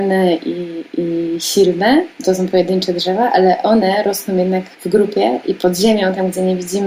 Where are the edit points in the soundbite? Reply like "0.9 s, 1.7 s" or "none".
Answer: 4.7 s